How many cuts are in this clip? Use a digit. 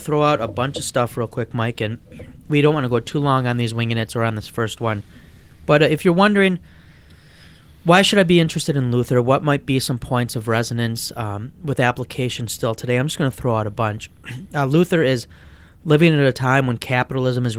0